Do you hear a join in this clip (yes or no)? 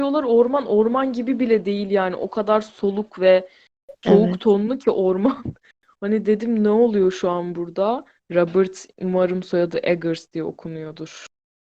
yes